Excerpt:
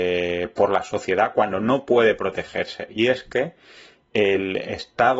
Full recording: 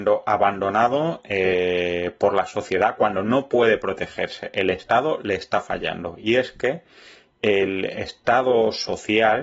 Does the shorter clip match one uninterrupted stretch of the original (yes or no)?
no